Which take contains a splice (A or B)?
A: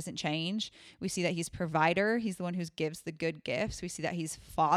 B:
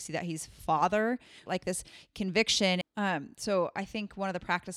B